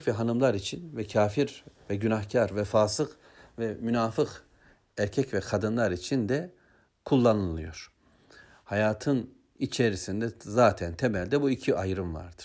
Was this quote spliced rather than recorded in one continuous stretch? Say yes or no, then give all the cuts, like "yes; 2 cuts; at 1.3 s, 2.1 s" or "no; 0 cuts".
no; 0 cuts